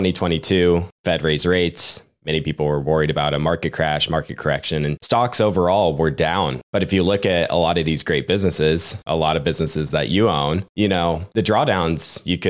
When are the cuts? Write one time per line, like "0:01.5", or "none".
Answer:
none